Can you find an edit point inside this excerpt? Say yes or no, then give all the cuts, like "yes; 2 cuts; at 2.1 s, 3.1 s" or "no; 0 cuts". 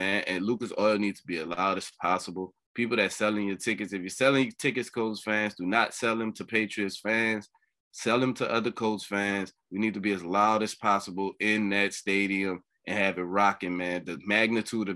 no; 0 cuts